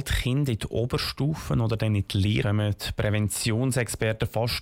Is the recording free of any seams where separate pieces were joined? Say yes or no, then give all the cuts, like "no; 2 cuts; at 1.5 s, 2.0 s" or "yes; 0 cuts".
no; 1 cut; at 2.4 s